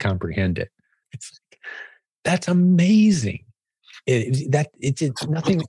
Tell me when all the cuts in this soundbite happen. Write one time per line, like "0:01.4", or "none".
0:01.0